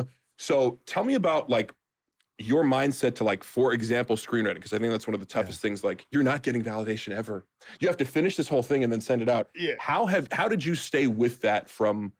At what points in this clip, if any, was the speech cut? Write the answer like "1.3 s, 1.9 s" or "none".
none